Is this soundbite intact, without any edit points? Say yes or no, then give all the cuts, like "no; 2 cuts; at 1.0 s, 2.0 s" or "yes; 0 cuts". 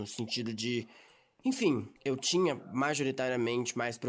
no; 1 cut; at 2.0 s